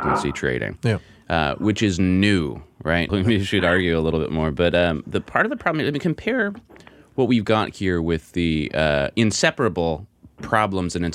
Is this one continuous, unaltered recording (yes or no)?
no